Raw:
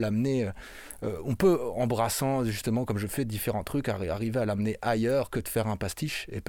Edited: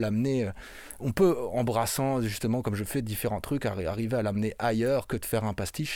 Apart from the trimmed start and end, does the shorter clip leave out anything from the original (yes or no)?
yes